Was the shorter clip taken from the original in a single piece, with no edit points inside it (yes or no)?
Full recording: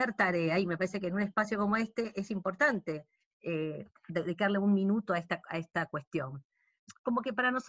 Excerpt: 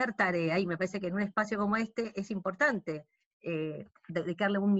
yes